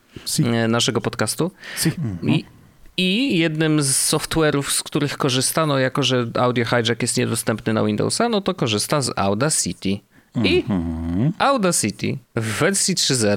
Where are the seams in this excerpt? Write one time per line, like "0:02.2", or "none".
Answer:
0:12.2